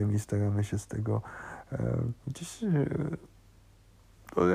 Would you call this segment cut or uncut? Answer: cut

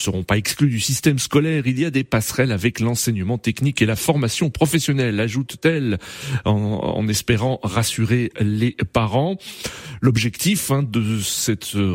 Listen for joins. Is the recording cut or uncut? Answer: uncut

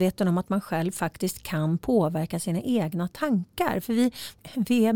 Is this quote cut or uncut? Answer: uncut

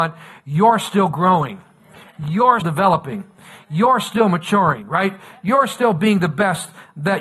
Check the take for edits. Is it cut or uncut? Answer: cut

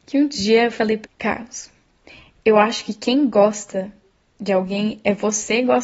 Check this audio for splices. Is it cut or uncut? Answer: cut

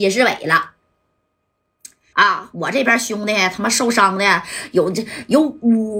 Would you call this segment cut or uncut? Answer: cut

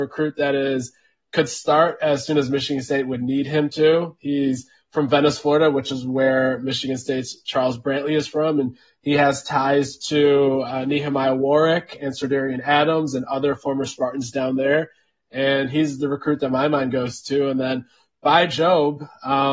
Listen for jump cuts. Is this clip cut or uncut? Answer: uncut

